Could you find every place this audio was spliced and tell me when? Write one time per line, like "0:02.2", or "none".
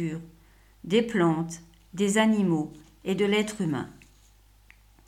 none